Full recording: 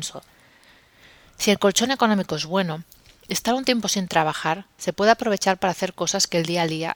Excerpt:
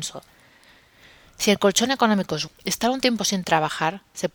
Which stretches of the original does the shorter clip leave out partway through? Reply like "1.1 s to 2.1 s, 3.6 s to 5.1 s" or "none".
2.5 s to 3.1 s

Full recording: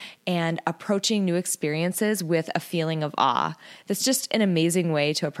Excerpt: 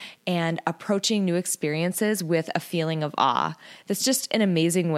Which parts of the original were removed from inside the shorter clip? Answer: none

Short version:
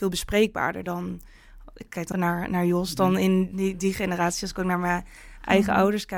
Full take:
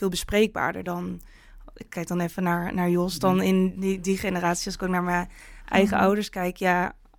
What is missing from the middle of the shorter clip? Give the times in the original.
2.1 s to 2.4 s

